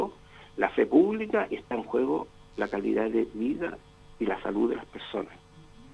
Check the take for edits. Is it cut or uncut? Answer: uncut